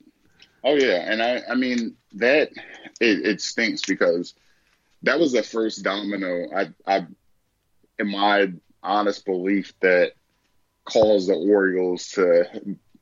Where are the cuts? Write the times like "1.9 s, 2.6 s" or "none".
none

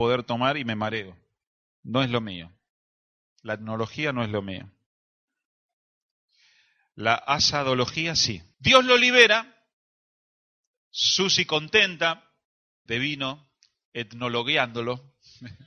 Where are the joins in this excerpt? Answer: 8.5 s, 12.9 s

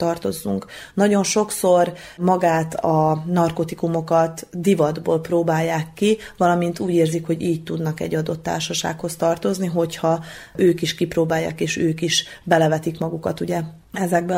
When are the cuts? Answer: none

